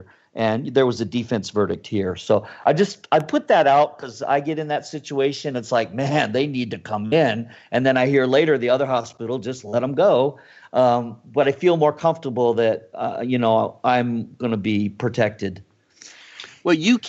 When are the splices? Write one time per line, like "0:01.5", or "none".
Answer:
none